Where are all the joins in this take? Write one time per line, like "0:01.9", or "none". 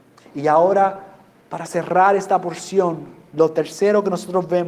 none